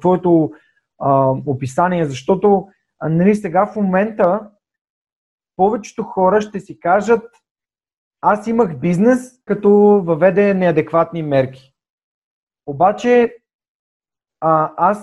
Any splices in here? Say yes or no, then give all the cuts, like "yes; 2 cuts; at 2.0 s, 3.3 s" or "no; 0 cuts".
yes; 1 cut; at 9.5 s